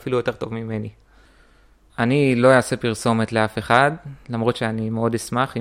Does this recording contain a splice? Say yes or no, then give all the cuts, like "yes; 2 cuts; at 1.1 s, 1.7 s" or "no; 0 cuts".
yes; 1 cut; at 1.9 s